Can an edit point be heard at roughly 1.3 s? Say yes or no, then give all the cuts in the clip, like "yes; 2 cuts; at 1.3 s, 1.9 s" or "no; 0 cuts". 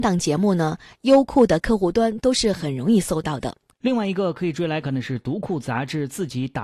no; 2 cuts; at 3.7 s, 4.8 s